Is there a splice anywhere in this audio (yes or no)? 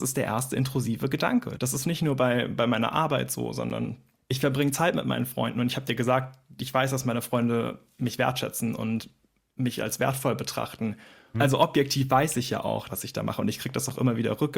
yes